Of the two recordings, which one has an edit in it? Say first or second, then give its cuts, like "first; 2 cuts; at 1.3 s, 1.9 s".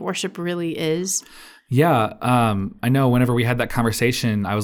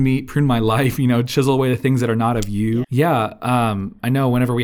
second; 1 cut; at 2.8 s